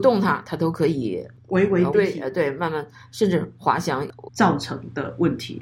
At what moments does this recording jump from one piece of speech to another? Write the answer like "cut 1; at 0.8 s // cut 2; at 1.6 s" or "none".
cut 1; at 1.9 s // cut 2; at 4.3 s